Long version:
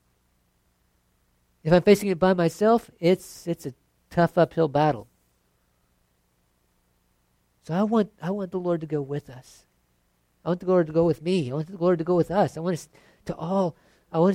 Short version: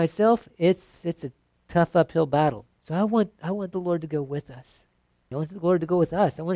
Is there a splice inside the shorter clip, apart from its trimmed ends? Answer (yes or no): yes